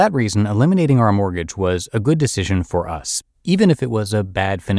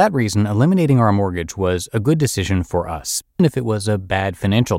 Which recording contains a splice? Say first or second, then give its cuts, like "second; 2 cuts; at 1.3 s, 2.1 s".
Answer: second; 1 cut; at 3.4 s